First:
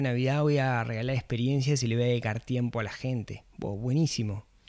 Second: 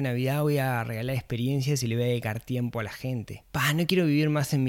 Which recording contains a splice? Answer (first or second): second